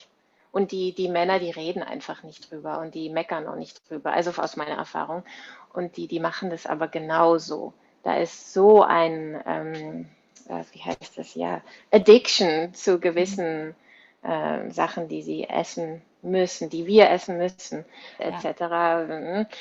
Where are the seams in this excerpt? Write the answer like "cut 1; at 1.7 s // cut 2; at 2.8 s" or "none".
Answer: cut 1; at 18.2 s

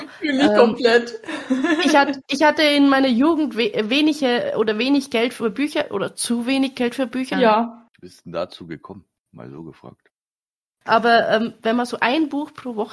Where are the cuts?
cut 1; at 7.3 s // cut 2; at 10.7 s

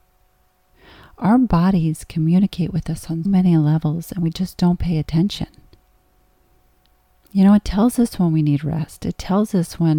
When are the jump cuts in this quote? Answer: cut 1; at 3.3 s

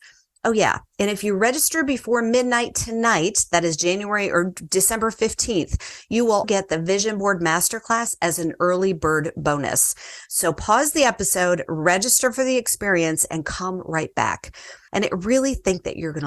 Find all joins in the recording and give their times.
cut 1; at 6.4 s // cut 2; at 14.9 s

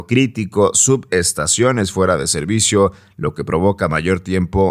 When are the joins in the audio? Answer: none

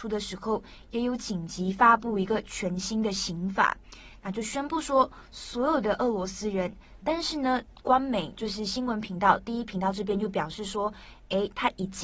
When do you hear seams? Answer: cut 1; at 7.0 s

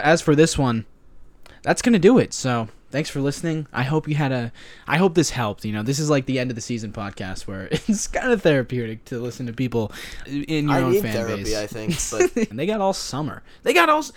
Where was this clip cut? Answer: cut 1; at 10.2 s // cut 2; at 12.5 s

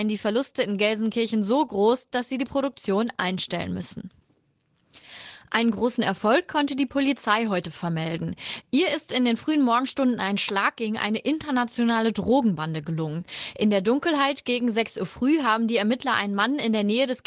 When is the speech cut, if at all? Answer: none

